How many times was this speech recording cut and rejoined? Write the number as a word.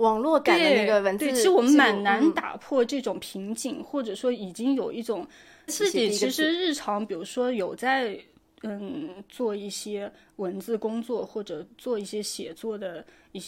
one